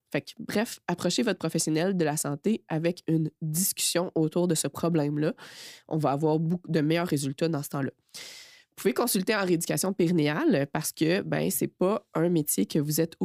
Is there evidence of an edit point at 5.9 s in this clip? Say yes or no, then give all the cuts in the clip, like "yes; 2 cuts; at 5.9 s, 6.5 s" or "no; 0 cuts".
no; 0 cuts